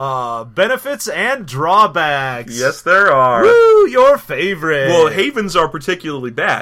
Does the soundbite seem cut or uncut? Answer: uncut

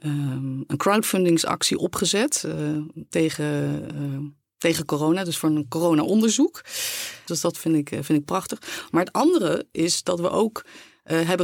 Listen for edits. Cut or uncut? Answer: cut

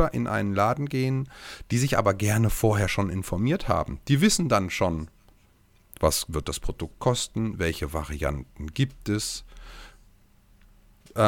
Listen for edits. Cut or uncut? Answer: uncut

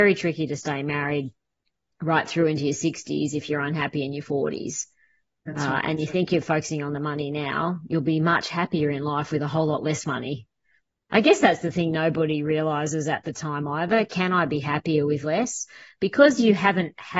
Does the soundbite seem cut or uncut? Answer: uncut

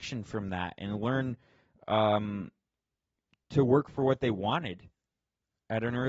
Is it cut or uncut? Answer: cut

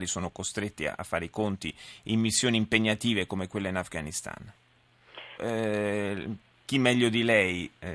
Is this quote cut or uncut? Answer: cut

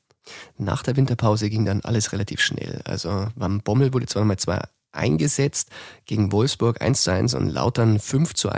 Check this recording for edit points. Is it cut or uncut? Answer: uncut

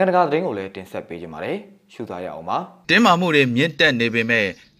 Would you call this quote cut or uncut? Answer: cut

